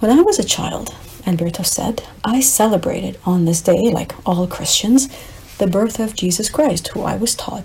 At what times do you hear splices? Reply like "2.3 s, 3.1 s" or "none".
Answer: 2.2 s